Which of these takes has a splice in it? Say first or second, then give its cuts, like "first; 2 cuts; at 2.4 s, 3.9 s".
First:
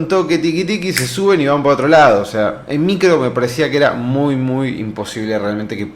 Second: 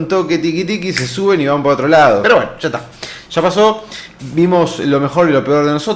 second; 1 cut; at 2.2 s